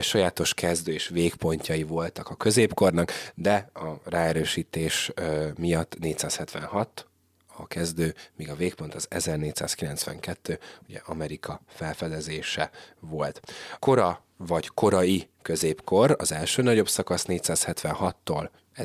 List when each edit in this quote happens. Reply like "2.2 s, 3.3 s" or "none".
13.8 s